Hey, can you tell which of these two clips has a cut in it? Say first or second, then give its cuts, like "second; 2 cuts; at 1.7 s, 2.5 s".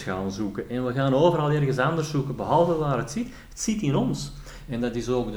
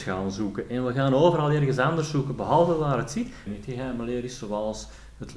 second; 1 cut; at 3.5 s